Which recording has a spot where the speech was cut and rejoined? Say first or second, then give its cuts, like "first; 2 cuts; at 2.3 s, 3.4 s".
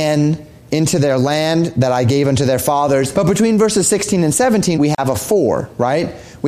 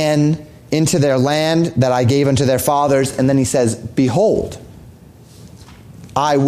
first; 2 cuts; at 3.1 s, 4.7 s